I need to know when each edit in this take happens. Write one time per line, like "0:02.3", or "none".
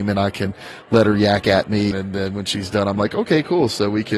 0:01.9